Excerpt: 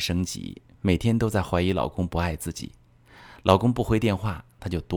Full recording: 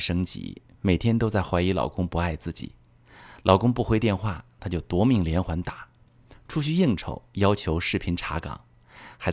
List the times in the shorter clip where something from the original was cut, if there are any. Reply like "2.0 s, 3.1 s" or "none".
none